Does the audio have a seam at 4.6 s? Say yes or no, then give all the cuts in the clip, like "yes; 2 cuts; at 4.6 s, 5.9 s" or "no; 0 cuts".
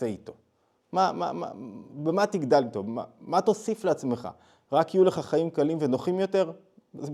no; 0 cuts